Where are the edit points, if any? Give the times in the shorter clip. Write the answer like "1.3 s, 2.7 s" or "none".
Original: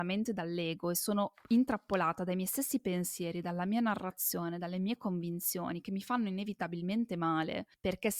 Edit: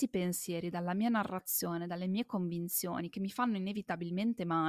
none